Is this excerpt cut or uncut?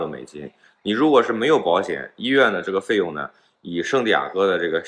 uncut